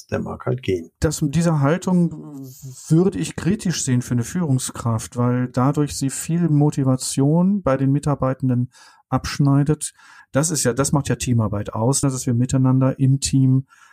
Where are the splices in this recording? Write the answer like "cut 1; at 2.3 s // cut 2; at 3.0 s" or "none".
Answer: cut 1; at 10.2 s // cut 2; at 12.0 s